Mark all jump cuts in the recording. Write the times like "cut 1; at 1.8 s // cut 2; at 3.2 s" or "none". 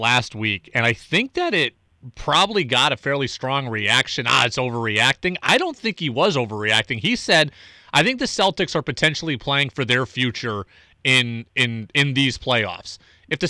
none